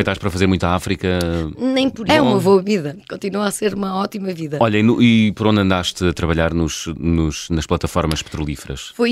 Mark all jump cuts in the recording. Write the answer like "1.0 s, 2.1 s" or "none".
2.1 s